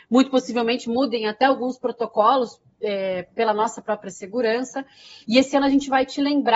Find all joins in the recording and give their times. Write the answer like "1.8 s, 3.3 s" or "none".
5.2 s